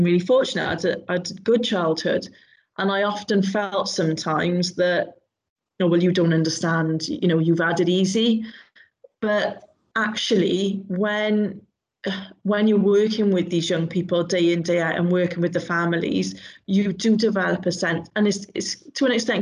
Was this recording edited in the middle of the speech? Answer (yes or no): no